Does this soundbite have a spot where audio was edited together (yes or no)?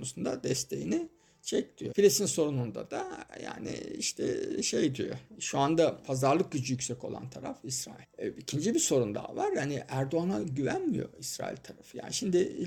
yes